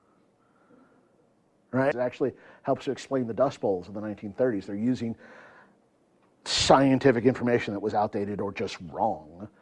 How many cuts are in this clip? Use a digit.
1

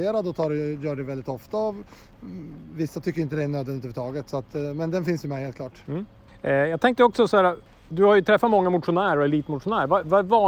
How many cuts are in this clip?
0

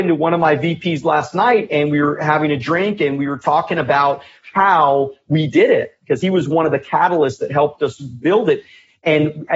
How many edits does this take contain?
0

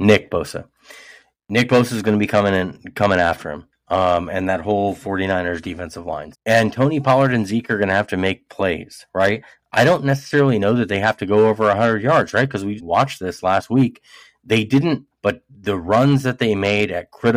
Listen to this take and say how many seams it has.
3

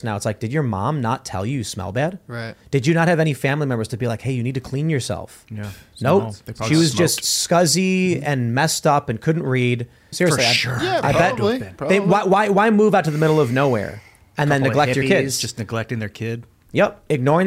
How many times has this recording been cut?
1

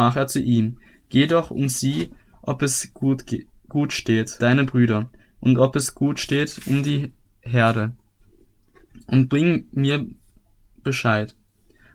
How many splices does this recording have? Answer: 1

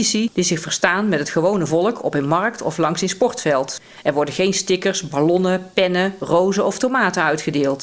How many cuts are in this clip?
1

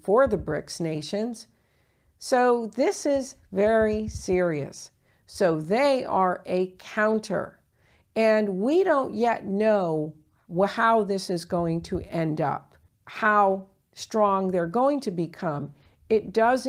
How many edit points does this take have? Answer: 1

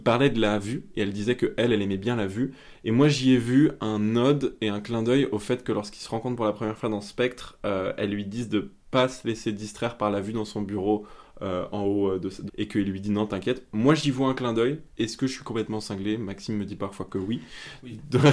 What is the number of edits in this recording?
1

